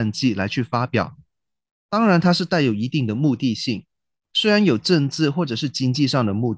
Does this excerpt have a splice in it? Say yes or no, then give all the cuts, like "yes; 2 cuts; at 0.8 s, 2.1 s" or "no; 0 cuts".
no; 0 cuts